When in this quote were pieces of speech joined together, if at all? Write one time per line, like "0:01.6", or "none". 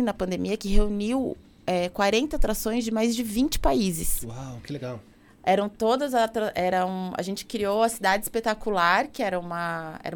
none